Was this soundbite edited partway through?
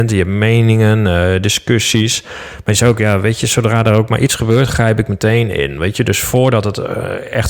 no; 0 cuts

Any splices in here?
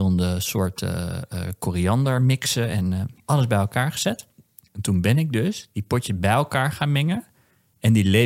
yes; 1 cut; at 3.2 s

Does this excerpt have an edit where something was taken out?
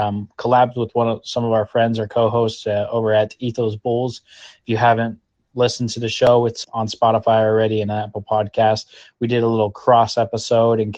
yes; 1 cut; at 6.6 s

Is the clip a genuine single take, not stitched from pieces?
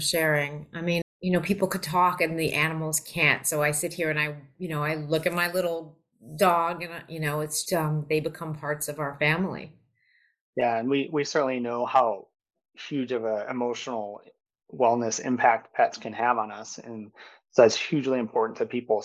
no; 2 cuts; at 1.0 s, 7.7 s

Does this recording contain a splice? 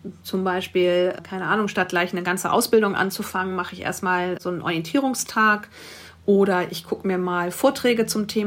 no; 0 cuts

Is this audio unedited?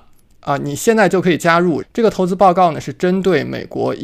no; 1 cut; at 1.8 s

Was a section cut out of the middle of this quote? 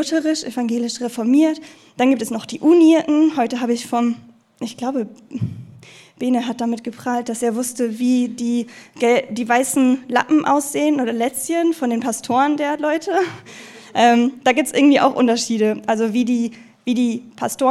no; 0 cuts

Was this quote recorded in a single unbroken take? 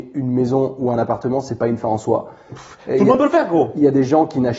yes; 0 cuts

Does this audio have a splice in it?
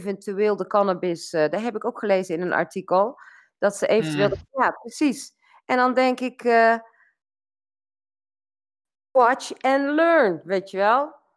yes; 1 cut; at 4.5 s

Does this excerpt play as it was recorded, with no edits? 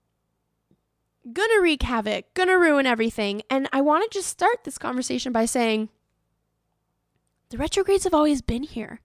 yes; 0 cuts

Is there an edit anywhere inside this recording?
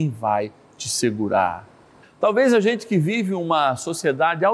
yes; 1 cut; at 2.0 s

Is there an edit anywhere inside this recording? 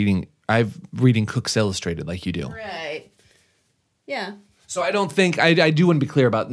no; 0 cuts

